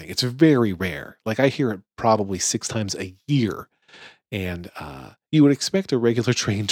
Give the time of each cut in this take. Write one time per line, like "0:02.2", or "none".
none

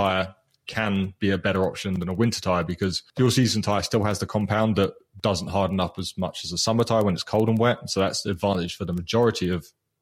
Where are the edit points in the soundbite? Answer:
0:03.1

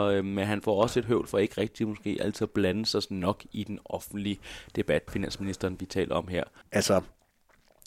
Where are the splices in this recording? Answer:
0:05.1
0:06.6

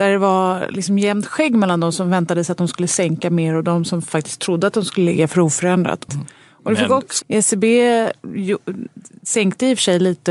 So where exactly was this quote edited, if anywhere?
0:06.1
0:07.2

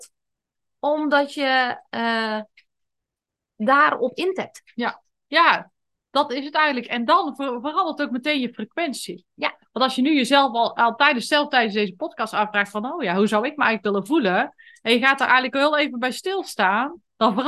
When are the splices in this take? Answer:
none

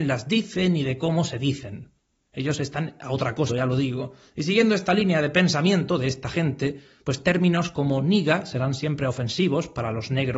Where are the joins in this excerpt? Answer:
0:03.5

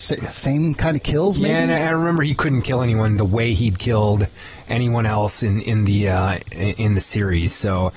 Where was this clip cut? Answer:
none

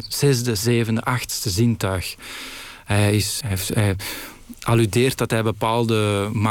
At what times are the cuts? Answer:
0:03.4

